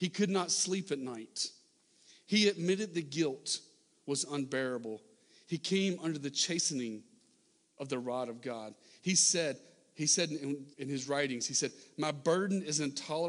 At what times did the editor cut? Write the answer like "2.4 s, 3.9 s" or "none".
10.7 s